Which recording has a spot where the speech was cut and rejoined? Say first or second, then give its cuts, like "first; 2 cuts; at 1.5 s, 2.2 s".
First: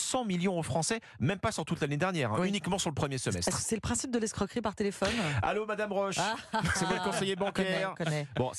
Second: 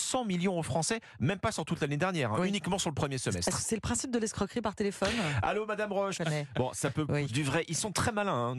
second; 2 cuts; at 6.1 s, 7.3 s